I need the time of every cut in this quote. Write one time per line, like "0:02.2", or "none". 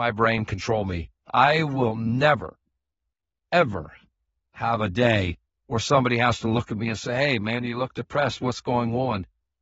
0:01.2